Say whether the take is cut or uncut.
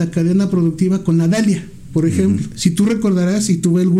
cut